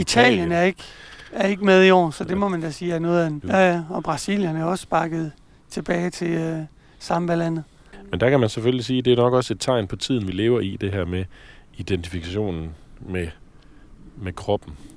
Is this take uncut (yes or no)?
no